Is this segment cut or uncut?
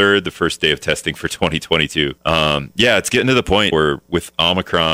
cut